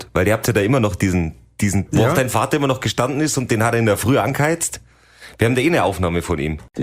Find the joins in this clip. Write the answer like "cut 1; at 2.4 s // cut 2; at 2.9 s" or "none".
cut 1; at 1.9 s